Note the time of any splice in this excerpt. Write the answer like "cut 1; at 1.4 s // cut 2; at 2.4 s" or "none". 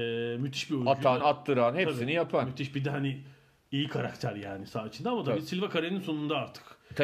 none